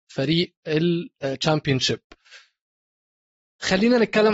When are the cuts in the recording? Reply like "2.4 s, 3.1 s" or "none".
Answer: none